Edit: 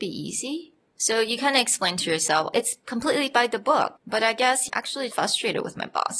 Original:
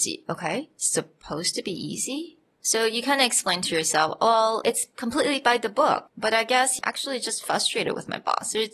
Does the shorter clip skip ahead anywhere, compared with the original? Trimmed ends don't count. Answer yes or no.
yes